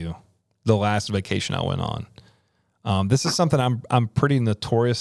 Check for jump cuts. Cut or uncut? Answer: uncut